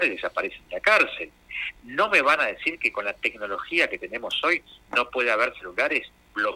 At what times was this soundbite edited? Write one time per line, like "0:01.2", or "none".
none